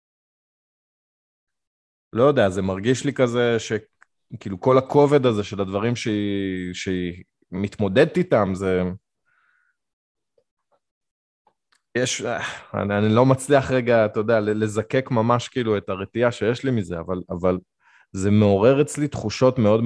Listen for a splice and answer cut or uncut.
cut